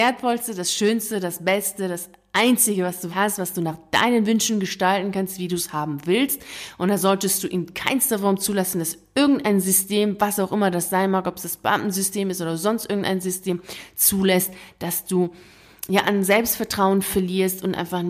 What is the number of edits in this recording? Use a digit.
1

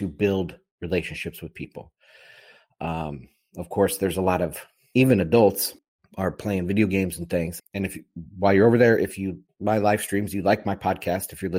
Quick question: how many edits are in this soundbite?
2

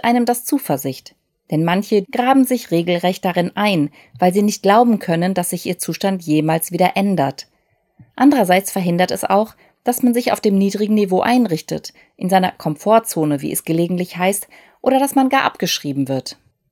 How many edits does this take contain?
1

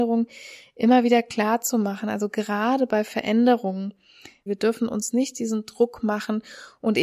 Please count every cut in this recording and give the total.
1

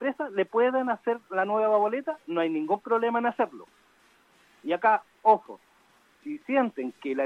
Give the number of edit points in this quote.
0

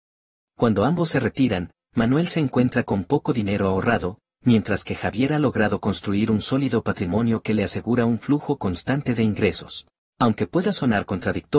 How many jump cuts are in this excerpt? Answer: 1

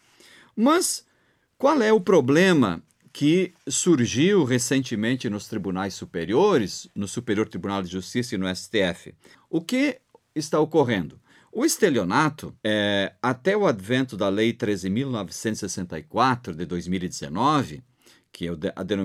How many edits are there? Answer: 2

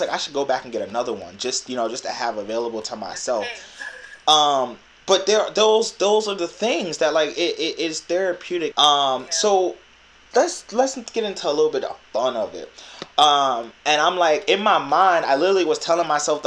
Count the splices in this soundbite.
3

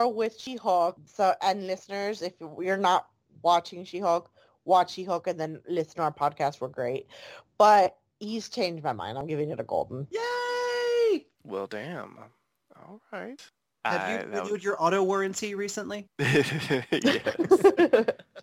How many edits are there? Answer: 0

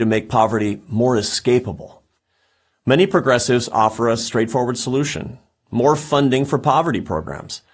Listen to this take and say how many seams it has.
0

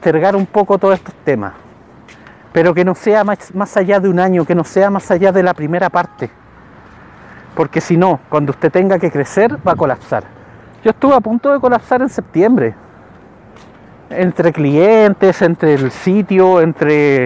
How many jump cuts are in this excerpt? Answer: 1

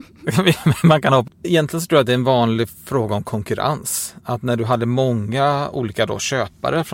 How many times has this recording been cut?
1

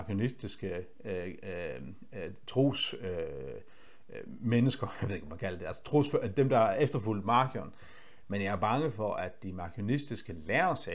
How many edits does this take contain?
1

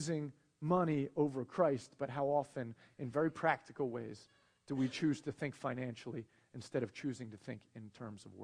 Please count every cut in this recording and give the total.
0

